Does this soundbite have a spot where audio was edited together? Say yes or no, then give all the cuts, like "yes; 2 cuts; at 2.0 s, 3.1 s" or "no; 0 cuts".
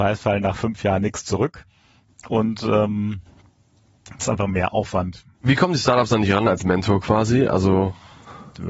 yes; 1 cut; at 5.4 s